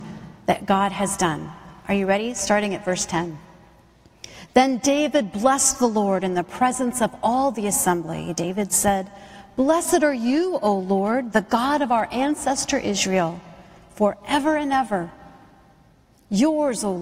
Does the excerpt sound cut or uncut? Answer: uncut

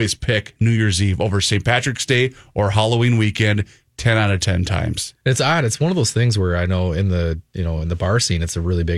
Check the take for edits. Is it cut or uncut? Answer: uncut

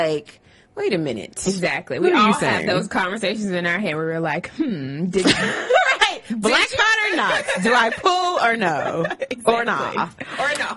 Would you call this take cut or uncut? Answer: uncut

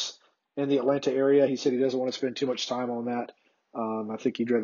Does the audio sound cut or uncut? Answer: uncut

